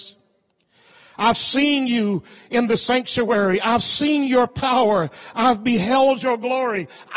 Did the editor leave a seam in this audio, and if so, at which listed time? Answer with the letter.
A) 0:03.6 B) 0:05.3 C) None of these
C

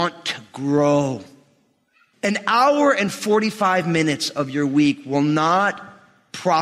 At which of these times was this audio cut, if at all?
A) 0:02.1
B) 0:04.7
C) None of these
A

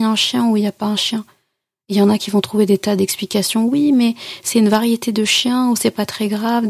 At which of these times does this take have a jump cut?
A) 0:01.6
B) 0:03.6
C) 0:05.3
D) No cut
D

